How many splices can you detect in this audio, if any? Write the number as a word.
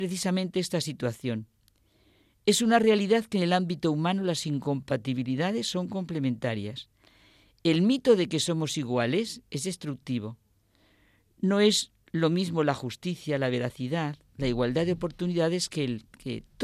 zero